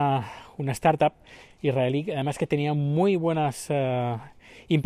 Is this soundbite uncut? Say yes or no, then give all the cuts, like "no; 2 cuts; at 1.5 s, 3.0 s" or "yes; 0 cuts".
yes; 0 cuts